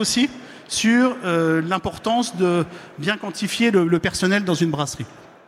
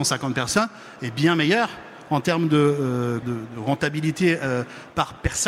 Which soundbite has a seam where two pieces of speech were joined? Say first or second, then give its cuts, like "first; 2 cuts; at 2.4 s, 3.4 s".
second; 1 cut; at 3.2 s